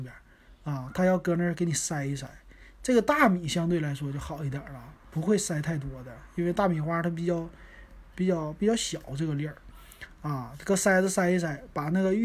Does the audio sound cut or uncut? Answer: uncut